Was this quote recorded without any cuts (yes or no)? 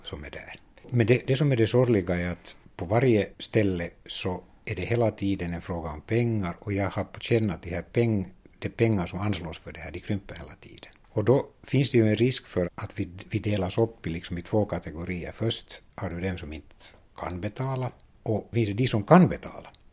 no